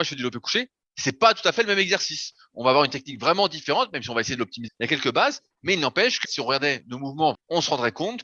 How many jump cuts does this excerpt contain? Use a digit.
3